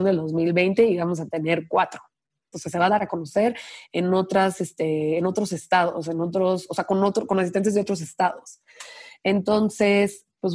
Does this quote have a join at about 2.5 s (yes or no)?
yes